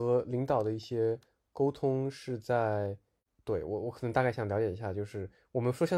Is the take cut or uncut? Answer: uncut